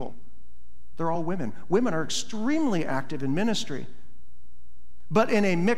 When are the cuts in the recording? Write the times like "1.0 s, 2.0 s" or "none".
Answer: none